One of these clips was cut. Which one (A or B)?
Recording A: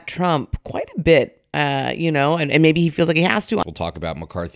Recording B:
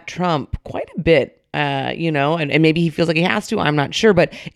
A